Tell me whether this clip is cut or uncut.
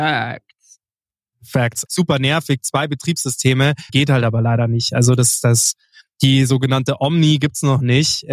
cut